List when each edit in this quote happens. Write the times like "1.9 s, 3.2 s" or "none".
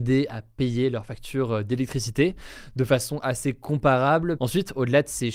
4.4 s